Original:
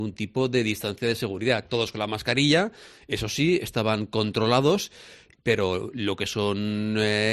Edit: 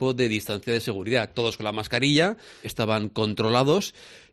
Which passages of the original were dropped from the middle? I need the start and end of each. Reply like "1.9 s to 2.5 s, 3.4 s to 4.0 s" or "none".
3.0 s to 3.6 s